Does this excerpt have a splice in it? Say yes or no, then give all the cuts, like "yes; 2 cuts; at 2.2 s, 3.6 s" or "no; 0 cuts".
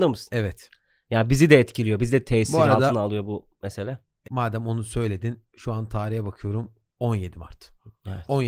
yes; 2 cuts; at 4.2 s, 5.5 s